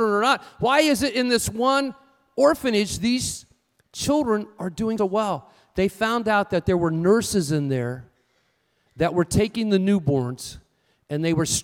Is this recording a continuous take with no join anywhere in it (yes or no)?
no